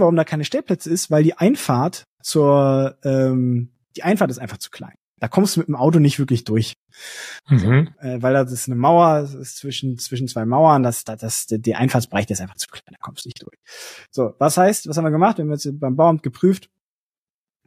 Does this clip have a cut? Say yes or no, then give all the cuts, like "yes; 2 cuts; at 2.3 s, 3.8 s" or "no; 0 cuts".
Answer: no; 0 cuts